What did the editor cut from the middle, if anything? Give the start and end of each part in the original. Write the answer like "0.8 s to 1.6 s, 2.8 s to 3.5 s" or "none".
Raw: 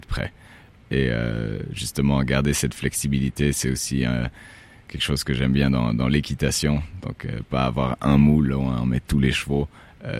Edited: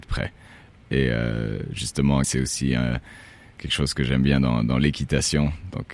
2.2 s to 3.5 s